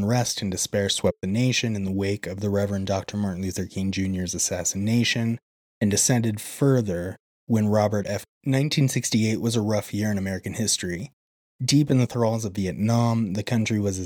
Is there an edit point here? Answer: yes; 1 cut; at 8.3 s

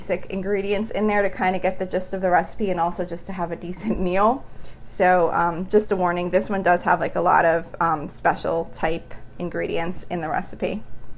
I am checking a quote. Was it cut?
no; 0 cuts

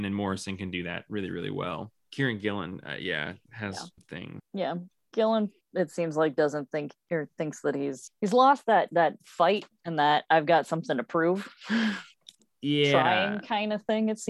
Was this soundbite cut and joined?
no; 0 cuts

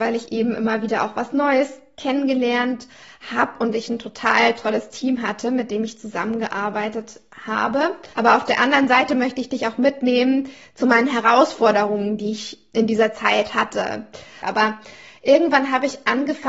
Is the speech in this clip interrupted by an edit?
yes; 2 cuts; at 8.1 s, 14.4 s

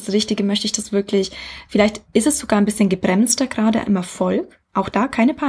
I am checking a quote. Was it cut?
no; 0 cuts

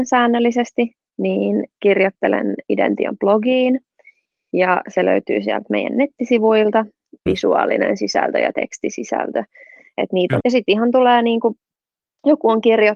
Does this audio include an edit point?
yes; 2 cuts; at 7.3 s, 10.4 s

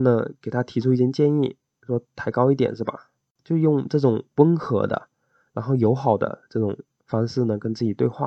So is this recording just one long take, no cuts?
yes; 0 cuts

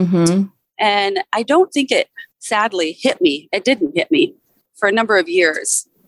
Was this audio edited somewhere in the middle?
yes; 1 cut; at 2.3 s

